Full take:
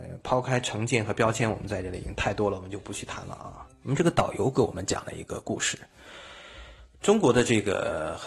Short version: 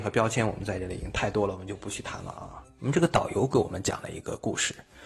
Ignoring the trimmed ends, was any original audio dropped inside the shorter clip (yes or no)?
no